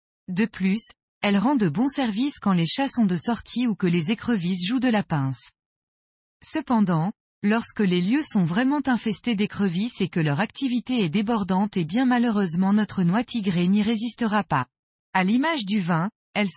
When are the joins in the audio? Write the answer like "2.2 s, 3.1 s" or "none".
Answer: 15.0 s